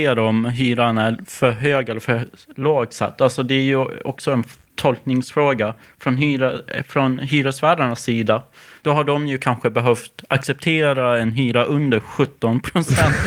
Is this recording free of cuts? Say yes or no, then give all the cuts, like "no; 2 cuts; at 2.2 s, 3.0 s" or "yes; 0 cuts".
yes; 0 cuts